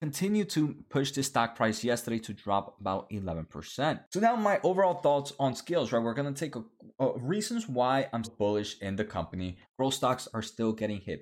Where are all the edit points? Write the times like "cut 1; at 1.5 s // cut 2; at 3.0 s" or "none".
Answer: cut 1; at 8.2 s // cut 2; at 9.6 s

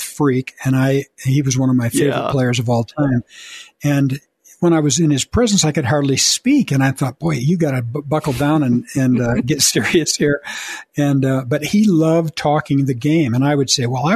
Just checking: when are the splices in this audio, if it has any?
none

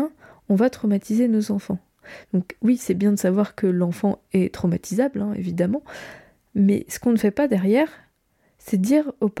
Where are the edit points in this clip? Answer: none

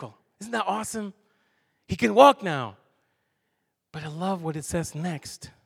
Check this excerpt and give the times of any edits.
none

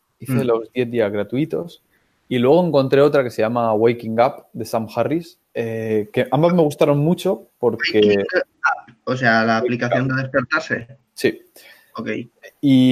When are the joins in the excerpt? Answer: cut 1; at 5.4 s

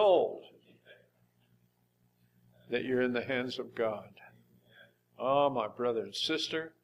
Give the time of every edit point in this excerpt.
none

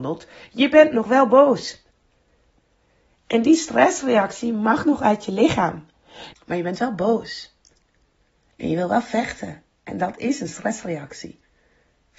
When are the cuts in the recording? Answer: cut 1; at 6.3 s

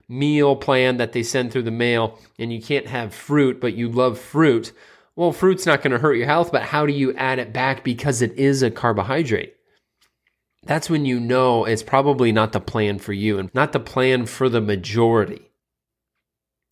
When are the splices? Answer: cut 1; at 10.5 s // cut 2; at 13.5 s

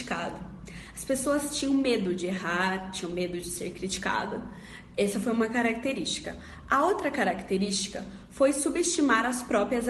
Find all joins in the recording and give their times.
none

